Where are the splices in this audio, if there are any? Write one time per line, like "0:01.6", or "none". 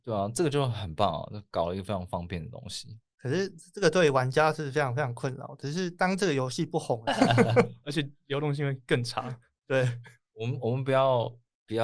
0:07.1